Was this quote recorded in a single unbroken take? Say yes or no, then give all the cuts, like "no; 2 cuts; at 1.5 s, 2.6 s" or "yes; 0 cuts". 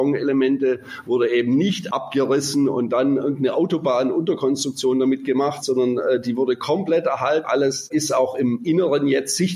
no; 1 cut; at 7.4 s